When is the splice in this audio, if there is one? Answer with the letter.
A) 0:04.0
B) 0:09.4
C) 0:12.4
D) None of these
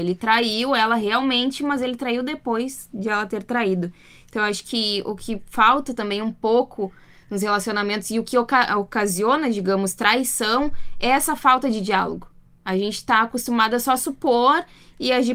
D